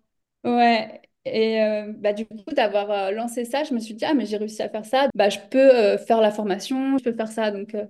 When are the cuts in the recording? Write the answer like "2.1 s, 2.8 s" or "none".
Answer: 5.1 s, 7.0 s